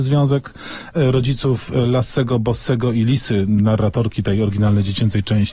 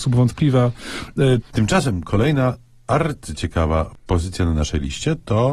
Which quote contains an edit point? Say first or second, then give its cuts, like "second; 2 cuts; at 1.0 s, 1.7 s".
second; 1 cut; at 1.4 s